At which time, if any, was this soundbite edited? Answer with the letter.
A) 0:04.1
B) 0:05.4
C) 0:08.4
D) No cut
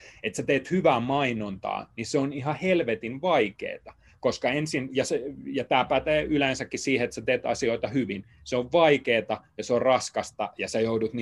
D